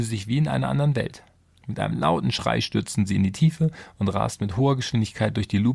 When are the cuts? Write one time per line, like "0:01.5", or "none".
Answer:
0:01.5